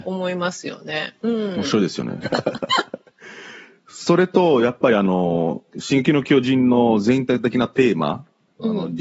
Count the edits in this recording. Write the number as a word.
one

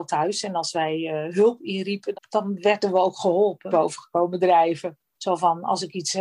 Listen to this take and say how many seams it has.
three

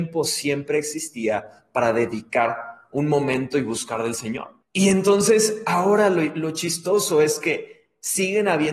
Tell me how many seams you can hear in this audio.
one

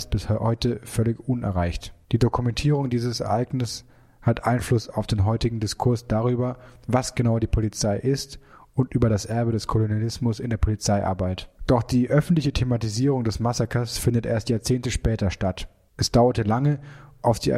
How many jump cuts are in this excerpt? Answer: two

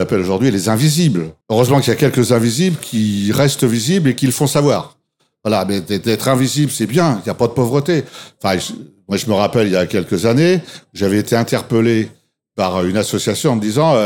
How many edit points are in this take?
one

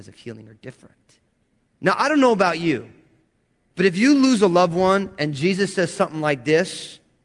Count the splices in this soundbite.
one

